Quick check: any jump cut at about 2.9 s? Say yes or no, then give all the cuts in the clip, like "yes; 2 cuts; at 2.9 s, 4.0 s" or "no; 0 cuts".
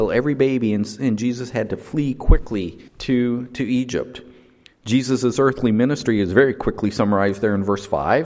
yes; 2 cuts; at 2.9 s, 4.7 s